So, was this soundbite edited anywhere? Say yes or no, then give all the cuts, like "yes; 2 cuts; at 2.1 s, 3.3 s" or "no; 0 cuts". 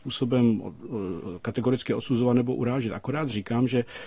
no; 0 cuts